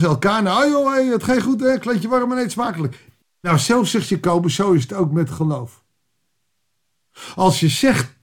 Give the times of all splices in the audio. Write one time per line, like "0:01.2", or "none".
0:03.2